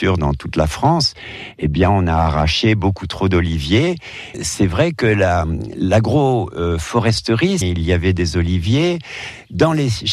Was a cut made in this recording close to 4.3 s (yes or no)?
yes